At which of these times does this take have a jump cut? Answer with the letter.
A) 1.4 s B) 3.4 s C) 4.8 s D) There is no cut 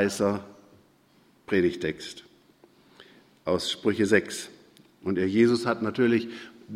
C